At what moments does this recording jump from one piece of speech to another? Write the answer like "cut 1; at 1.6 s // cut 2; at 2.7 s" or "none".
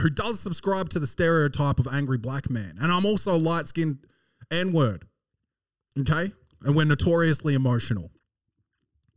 none